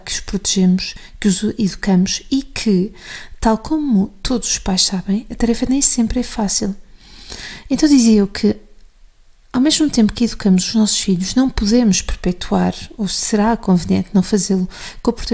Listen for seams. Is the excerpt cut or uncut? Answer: uncut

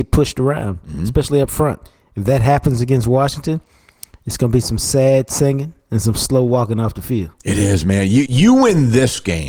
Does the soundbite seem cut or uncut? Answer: cut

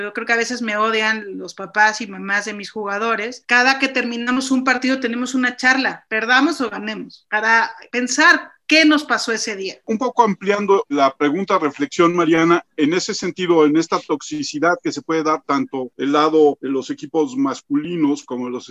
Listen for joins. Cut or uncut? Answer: uncut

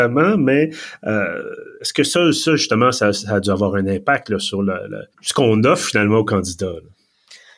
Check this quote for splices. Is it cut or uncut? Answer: cut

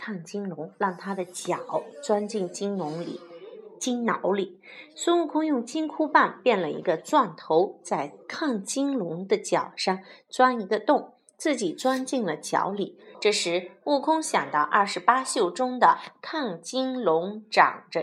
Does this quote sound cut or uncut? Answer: cut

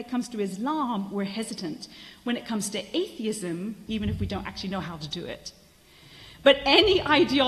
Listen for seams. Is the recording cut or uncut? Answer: cut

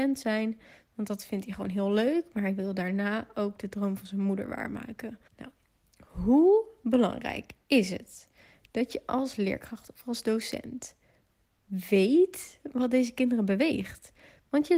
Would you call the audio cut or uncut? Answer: cut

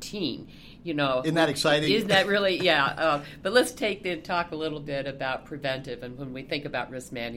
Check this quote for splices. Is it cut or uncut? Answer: uncut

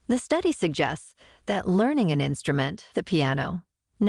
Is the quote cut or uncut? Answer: cut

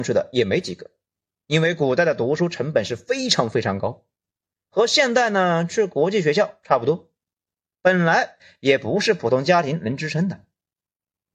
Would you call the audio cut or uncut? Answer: uncut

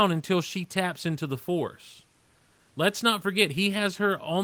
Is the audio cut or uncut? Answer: uncut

